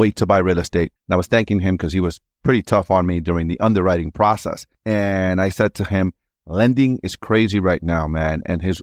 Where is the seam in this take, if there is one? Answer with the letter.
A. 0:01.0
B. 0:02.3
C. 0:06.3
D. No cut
A